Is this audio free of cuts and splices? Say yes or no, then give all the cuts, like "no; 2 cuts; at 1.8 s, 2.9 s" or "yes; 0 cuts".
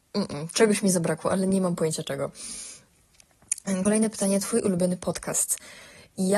yes; 0 cuts